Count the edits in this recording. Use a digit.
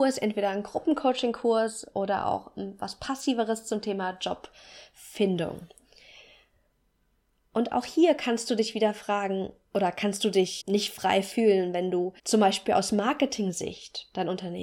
2